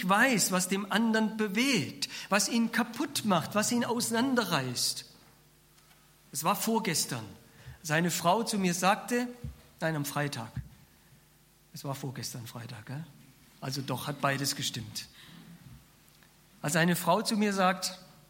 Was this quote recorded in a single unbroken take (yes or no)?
yes